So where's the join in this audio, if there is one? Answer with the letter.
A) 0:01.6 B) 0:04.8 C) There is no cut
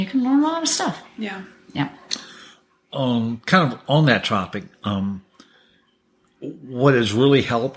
C